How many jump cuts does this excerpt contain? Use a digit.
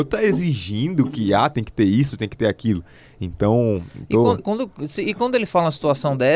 1